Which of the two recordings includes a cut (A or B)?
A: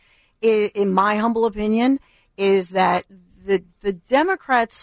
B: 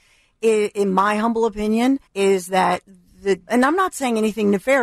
B